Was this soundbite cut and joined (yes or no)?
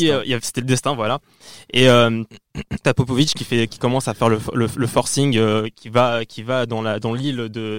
yes